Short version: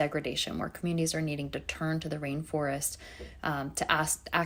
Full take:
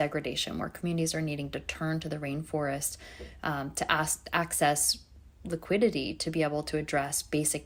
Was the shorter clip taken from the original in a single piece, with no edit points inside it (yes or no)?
yes